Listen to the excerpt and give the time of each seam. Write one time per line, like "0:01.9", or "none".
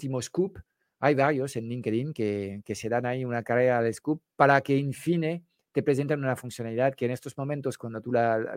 none